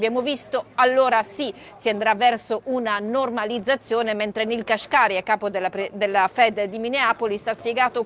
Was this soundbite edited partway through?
no; 0 cuts

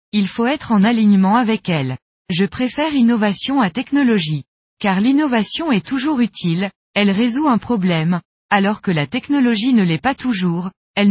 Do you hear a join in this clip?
no; 0 cuts

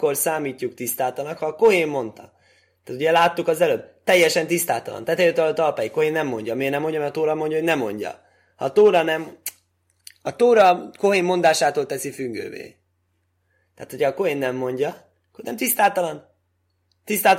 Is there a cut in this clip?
no; 0 cuts

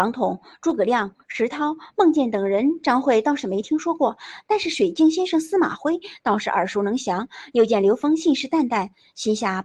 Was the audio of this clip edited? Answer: no; 0 cuts

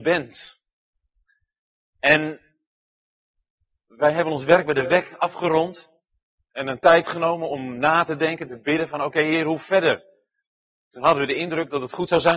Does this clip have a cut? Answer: no; 0 cuts

